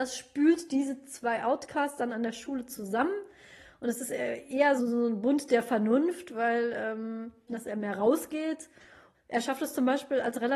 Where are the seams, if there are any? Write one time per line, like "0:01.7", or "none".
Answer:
0:04.8
0:07.5
0:09.1